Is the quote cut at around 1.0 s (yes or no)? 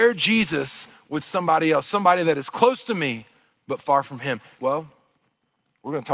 no